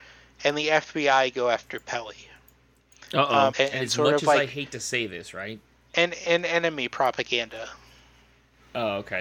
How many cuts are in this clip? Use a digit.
1